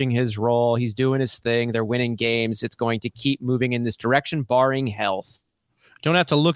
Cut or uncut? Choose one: uncut